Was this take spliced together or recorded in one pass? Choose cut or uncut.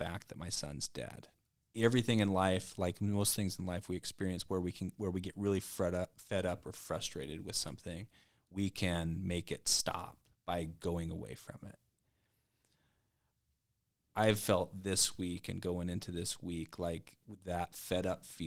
cut